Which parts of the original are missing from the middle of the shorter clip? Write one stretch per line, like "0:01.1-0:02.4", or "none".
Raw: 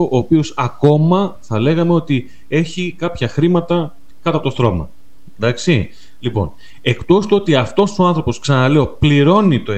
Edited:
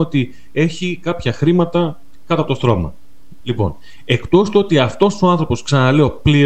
0:05.4-0:06.2